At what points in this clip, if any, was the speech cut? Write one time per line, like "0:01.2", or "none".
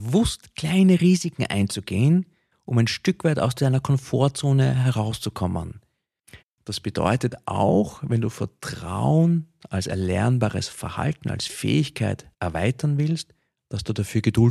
0:06.4
0:12.3